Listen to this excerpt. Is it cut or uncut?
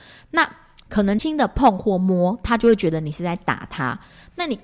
cut